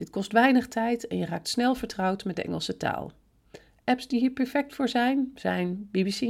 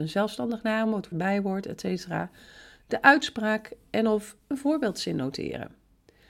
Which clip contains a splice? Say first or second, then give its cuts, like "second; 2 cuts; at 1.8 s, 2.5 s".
second; 1 cut; at 1.1 s